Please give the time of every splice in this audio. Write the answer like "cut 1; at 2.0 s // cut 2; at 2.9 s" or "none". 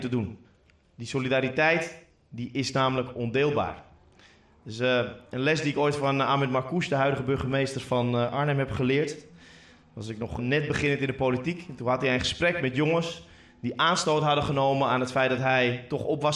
cut 1; at 10.4 s

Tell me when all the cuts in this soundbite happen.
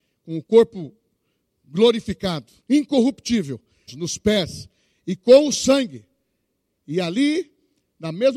cut 1; at 2.6 s // cut 2; at 3.9 s

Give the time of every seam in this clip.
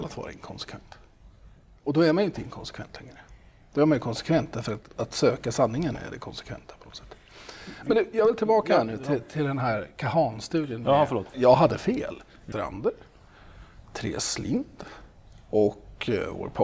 cut 1; at 11.3 s // cut 2; at 12.5 s

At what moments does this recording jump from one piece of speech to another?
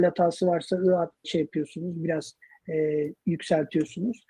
cut 1; at 1.2 s

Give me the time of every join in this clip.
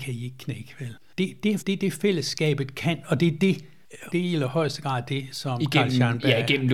cut 1; at 1.6 s // cut 2; at 4.1 s

